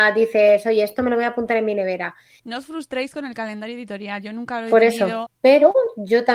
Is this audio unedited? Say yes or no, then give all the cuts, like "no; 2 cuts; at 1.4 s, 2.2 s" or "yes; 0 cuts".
no; 2 cuts; at 2.4 s, 5.3 s